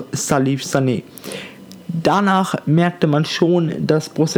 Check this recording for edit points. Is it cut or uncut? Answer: uncut